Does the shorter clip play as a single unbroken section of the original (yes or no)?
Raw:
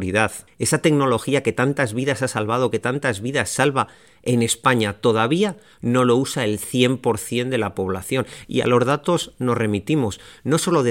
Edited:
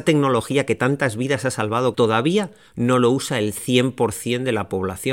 no